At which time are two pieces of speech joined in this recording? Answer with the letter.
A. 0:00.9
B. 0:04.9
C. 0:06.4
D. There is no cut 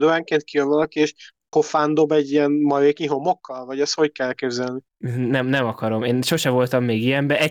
B